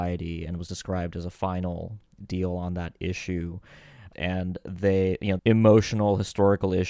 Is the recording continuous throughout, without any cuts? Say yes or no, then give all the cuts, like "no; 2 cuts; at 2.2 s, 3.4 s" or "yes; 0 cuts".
no; 2 cuts; at 4.1 s, 5.4 s